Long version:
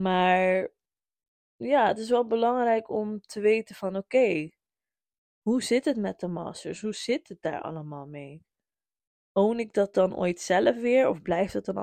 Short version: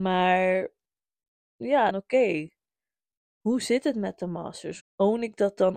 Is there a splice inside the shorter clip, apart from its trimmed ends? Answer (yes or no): yes